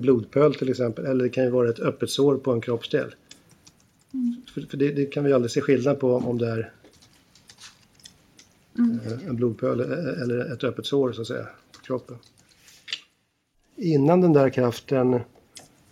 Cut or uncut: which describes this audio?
cut